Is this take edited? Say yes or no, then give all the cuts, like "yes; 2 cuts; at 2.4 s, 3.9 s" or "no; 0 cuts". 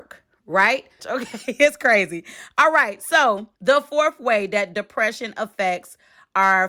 yes; 2 cuts; at 1.0 s, 3.6 s